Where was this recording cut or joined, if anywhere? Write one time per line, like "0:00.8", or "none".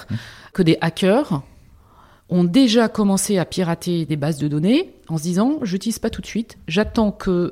none